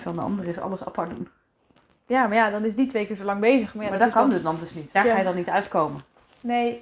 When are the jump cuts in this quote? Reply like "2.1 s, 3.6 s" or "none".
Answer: 4.9 s